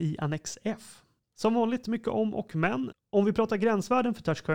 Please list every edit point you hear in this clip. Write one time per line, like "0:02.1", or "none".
0:01.2
0:02.9